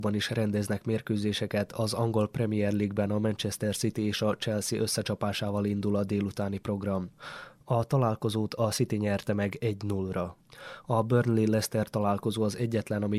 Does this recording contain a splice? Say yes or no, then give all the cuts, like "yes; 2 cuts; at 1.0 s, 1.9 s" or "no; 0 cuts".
no; 0 cuts